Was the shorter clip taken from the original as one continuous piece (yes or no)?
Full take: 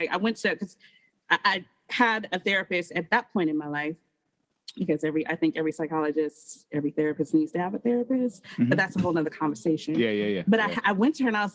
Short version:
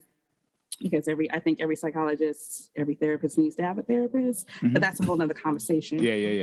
yes